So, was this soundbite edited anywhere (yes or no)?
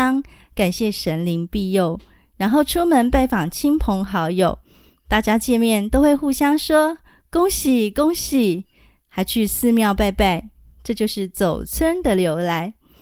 no